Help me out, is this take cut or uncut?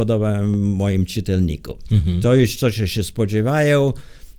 uncut